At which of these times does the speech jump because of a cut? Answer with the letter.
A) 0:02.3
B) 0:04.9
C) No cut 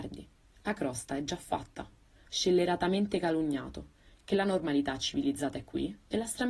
A